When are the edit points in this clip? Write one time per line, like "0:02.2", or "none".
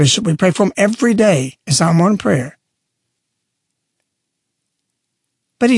0:01.6